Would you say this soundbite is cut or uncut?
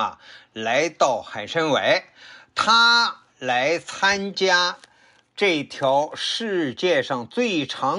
uncut